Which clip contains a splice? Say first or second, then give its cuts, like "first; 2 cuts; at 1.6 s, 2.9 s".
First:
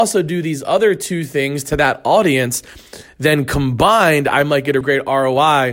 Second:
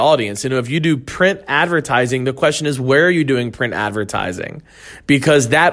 first; 1 cut; at 4.8 s